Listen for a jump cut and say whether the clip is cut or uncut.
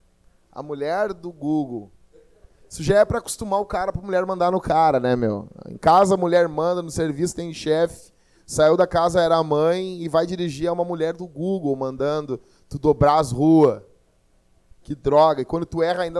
uncut